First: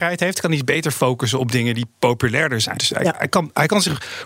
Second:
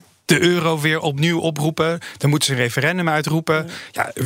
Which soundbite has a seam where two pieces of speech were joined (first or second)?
first